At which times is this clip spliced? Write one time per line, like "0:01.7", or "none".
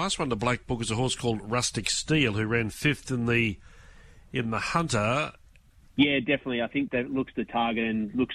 0:05.8
0:06.9